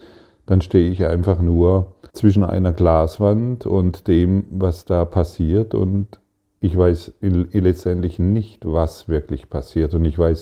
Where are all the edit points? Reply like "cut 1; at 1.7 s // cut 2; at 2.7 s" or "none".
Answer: cut 1; at 2.1 s